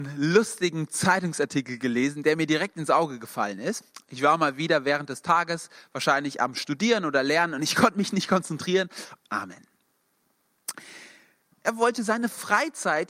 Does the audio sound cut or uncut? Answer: cut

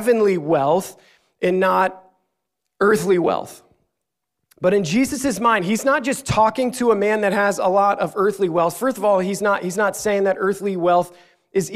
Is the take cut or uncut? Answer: uncut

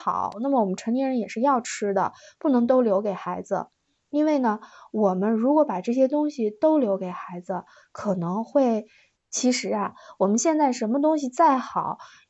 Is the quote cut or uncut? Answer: cut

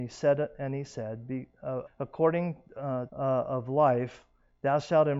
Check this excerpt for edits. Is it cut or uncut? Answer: cut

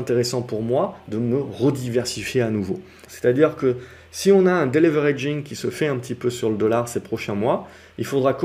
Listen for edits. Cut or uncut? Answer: cut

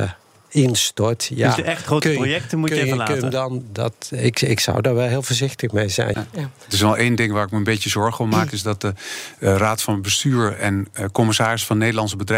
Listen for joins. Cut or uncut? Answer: cut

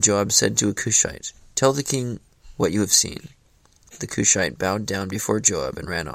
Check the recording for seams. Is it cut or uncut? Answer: cut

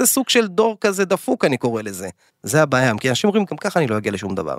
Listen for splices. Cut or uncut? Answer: cut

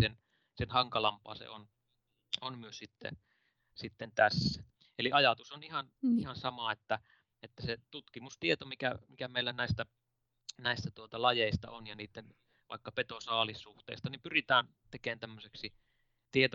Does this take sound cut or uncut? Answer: uncut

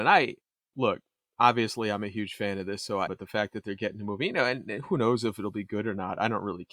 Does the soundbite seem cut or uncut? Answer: cut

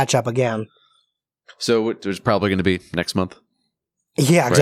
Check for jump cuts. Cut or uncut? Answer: uncut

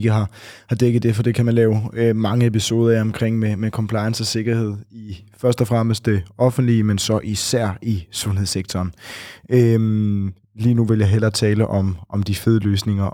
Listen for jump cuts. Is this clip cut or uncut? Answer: uncut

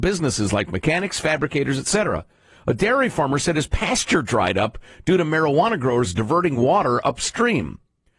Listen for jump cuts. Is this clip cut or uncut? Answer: uncut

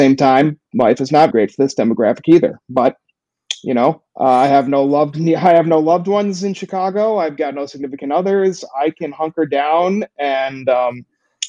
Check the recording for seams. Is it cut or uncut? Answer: cut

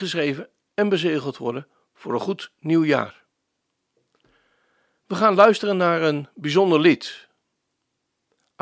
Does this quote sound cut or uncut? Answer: uncut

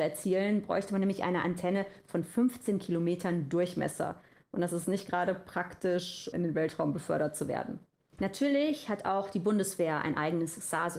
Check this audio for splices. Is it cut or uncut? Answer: cut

